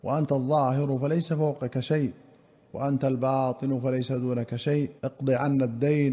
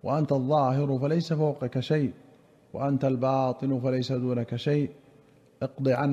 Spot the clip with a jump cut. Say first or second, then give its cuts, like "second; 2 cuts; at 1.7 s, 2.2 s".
first; 1 cut; at 5.0 s